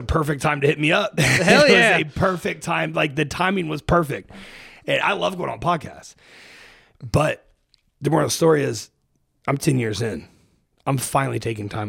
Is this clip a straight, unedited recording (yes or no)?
yes